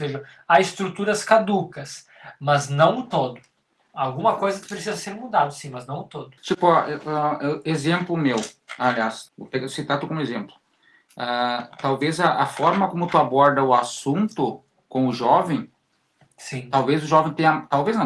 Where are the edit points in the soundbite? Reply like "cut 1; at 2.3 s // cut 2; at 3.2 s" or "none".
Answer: cut 1; at 6.4 s // cut 2; at 9.3 s